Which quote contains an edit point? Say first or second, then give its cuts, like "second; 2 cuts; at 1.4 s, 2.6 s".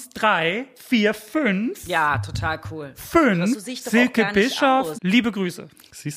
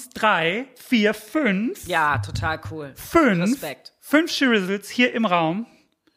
first; 2 cuts; at 3.5 s, 4.9 s